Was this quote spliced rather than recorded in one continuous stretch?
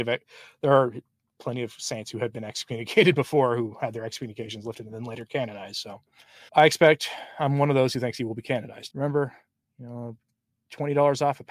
yes; 2 cuts; at 6.5 s, 8.9 s

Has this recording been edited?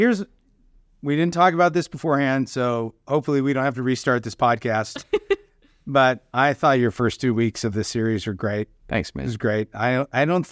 no; 0 cuts

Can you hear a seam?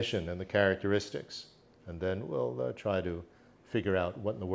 no; 0 cuts

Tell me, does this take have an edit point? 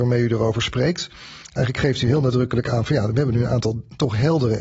no; 0 cuts

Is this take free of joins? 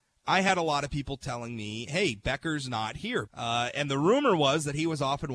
no; 1 cut; at 3.3 s

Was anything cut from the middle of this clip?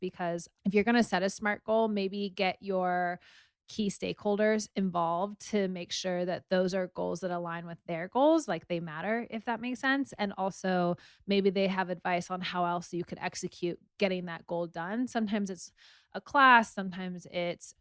no; 0 cuts

